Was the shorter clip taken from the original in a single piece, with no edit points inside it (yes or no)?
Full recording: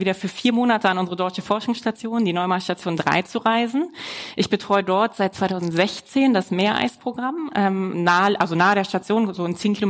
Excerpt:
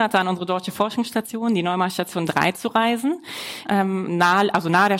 no